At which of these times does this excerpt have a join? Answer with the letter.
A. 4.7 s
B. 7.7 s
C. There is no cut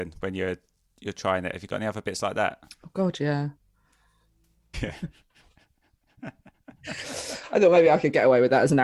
A